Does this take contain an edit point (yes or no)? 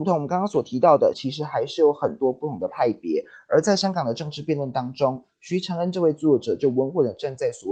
yes